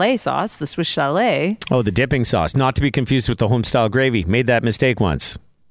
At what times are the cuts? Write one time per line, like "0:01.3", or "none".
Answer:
none